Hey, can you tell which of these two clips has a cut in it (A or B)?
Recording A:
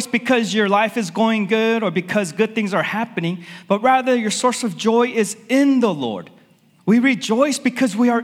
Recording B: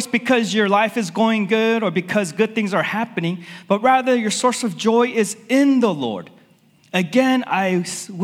A